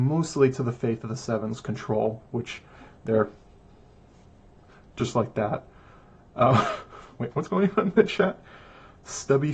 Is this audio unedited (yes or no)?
no